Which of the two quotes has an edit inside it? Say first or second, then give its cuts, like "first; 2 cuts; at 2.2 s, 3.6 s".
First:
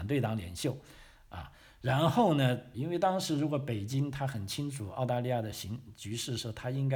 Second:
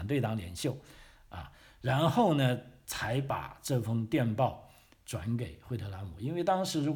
first; 1 cut; at 2.7 s